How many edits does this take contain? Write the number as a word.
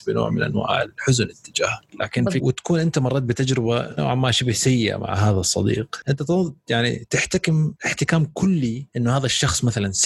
one